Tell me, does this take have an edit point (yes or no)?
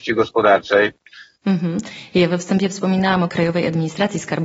yes